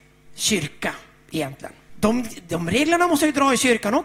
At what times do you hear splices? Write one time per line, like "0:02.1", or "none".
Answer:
0:01.9